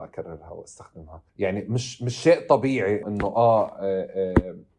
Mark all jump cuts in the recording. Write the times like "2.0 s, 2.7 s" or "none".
1.3 s, 3.0 s